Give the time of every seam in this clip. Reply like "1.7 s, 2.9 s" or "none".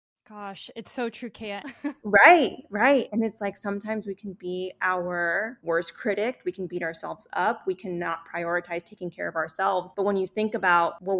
1.6 s